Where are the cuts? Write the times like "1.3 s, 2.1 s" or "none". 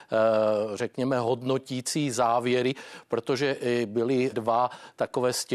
4.3 s